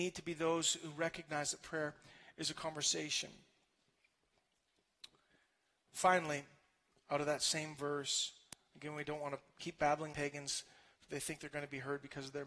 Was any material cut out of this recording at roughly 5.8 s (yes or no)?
no